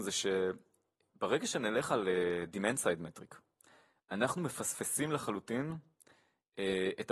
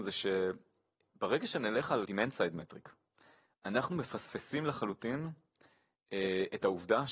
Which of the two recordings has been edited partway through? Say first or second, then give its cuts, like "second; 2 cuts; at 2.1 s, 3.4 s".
second; 1 cut; at 2.0 s